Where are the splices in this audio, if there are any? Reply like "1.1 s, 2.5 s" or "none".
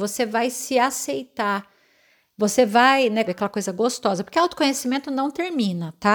3.3 s